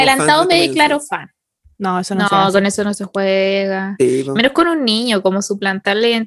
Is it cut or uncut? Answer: cut